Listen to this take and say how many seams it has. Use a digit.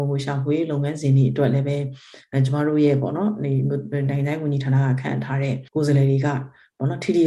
1